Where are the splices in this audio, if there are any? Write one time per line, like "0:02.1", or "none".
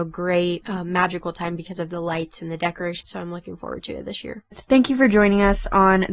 0:03.0
0:04.5